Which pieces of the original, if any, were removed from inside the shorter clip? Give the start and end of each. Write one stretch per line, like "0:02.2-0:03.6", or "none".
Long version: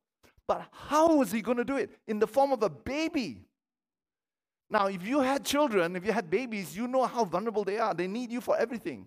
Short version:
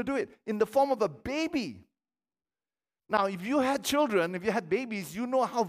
none